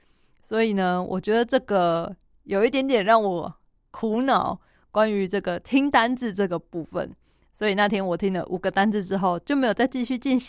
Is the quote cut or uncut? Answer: uncut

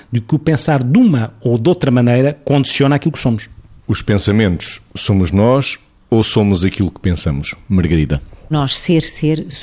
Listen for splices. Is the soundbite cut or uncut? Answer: uncut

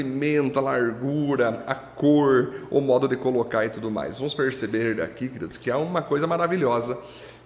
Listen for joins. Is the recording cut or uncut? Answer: uncut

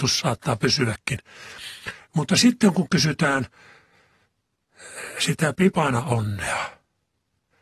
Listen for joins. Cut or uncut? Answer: uncut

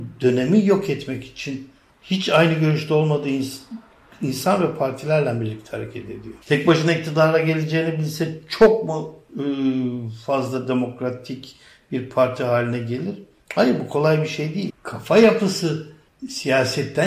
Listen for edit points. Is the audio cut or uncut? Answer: cut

